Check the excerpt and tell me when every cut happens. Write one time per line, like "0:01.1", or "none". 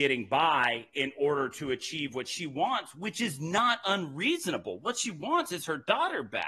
none